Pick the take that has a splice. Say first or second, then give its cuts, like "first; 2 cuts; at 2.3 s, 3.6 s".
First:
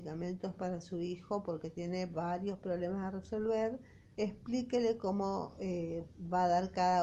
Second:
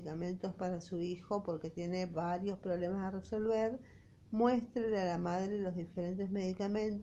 first; 1 cut; at 4.1 s